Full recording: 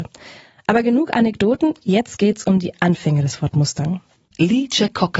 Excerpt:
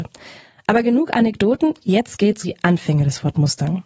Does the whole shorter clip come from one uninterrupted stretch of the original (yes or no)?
no